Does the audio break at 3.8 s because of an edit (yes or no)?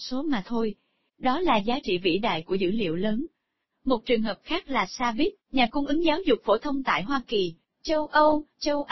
no